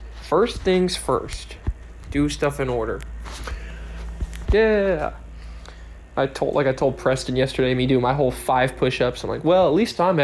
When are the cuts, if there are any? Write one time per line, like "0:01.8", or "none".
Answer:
0:04.4